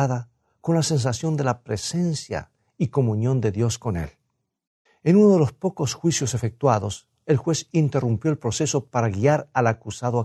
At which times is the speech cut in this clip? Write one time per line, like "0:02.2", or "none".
0:04.9